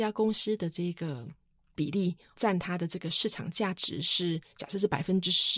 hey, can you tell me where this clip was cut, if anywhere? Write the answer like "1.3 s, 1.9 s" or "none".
none